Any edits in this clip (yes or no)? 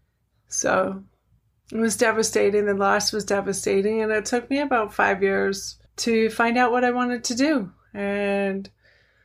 yes